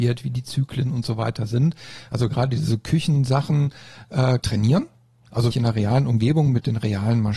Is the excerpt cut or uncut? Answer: cut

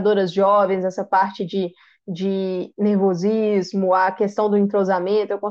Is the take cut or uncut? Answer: uncut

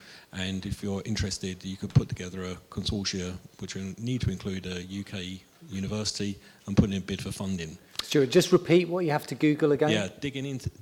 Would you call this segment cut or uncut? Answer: uncut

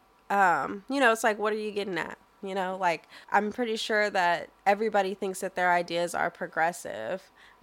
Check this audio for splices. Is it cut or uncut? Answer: cut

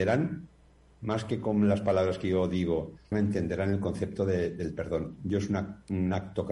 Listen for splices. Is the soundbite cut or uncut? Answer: cut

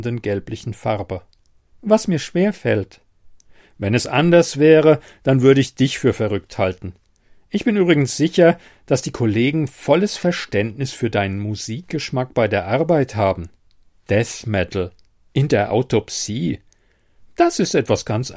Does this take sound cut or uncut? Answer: cut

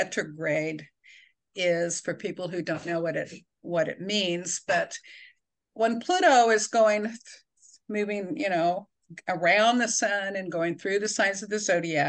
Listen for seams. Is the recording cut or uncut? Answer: cut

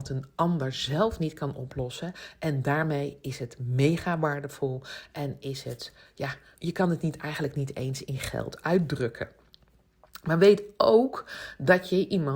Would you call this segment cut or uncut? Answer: cut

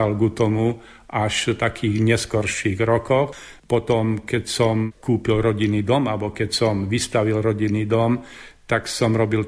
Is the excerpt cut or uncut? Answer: cut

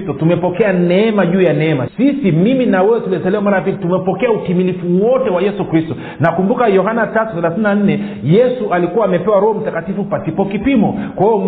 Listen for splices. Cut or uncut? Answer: cut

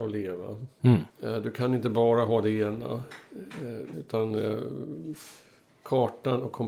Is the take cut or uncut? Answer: cut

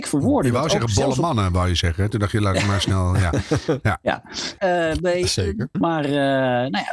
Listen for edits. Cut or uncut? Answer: cut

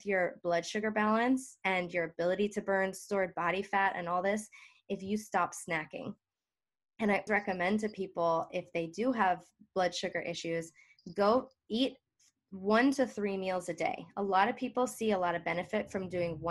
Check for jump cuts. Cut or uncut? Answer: cut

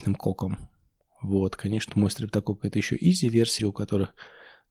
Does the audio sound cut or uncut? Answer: cut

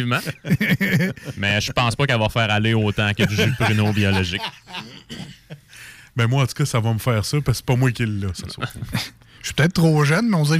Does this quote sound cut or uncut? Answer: uncut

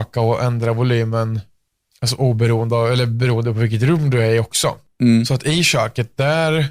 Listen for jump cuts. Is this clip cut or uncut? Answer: uncut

